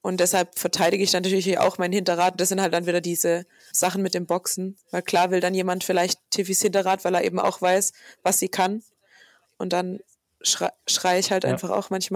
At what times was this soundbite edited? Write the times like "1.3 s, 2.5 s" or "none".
3.7 s